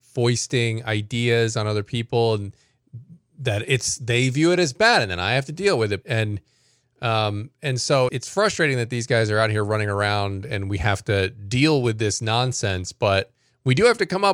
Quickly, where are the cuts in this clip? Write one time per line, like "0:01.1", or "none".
0:06.0
0:08.1